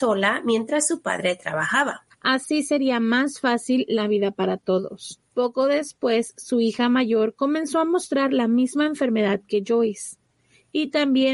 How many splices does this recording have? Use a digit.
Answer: 1